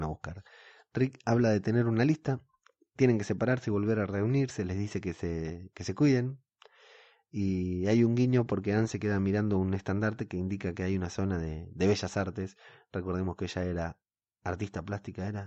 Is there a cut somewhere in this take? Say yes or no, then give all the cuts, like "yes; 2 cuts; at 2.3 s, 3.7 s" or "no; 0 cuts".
no; 0 cuts